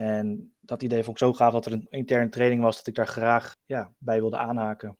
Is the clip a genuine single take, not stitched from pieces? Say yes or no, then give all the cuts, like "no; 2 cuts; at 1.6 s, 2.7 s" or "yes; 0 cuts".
no; 1 cut; at 3.5 s